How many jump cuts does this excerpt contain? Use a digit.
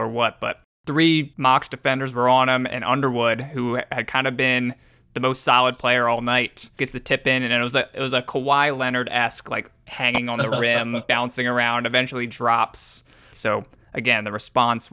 2